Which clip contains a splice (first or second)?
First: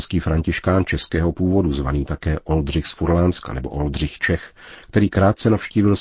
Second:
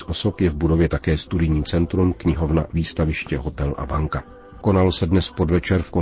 second